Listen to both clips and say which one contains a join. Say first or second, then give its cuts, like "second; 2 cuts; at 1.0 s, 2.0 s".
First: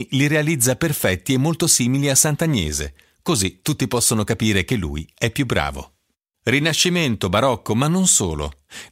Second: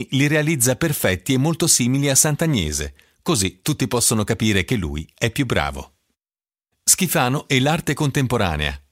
first; 1 cut; at 6.3 s